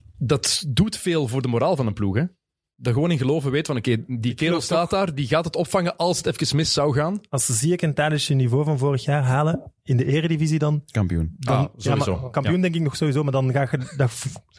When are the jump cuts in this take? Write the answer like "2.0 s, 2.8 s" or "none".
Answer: none